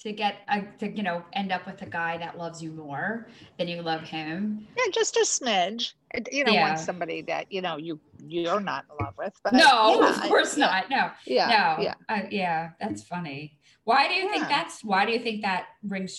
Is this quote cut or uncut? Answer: uncut